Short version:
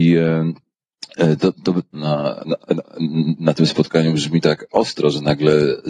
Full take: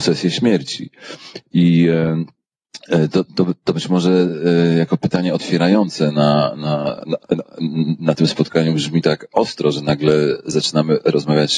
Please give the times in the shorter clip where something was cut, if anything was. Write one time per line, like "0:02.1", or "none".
0:01.9